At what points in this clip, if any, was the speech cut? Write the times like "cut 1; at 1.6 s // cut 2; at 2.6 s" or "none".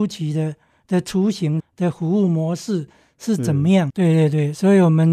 cut 1; at 1.6 s // cut 2; at 3.9 s

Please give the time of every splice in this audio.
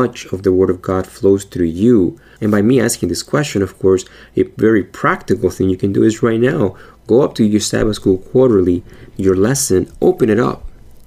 cut 1; at 2.4 s

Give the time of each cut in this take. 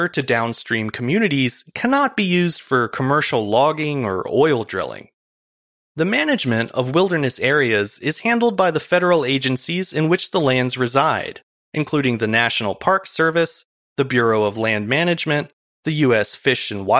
none

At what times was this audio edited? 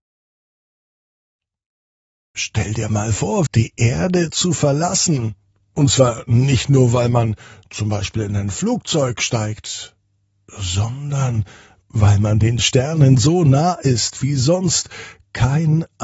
cut 1; at 3.5 s

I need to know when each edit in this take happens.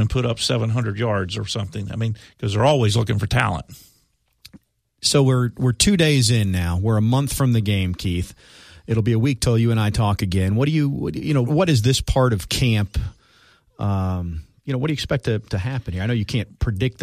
cut 1; at 11.5 s

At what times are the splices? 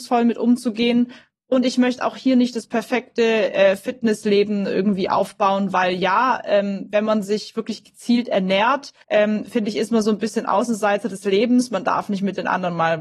cut 1; at 9.0 s

